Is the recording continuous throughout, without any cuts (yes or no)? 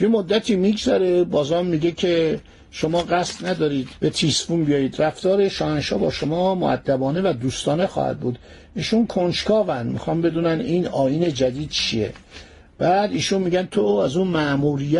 yes